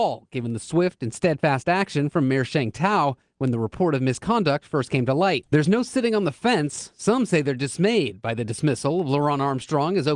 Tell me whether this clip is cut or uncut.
cut